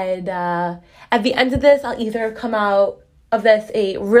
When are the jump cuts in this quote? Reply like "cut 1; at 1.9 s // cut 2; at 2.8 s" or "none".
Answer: none